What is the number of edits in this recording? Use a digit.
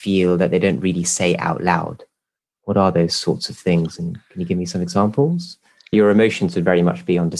1